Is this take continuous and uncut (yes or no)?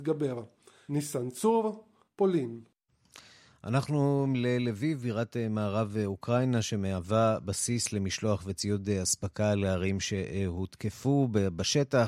yes